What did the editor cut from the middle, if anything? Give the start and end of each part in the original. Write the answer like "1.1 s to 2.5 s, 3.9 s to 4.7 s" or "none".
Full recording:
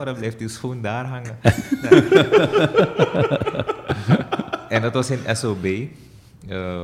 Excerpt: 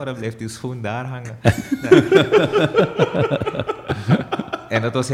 none